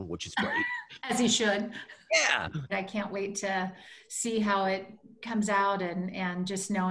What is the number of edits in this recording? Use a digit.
1